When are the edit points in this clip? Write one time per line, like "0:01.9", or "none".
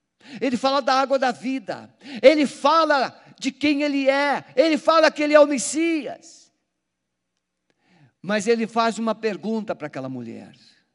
none